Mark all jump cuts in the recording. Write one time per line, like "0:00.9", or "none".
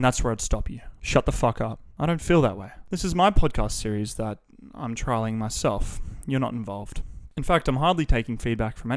none